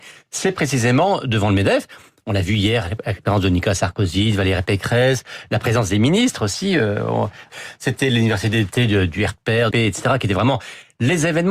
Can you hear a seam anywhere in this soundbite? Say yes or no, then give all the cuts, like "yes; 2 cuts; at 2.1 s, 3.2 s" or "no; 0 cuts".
yes; 2 cuts; at 7.5 s, 9.7 s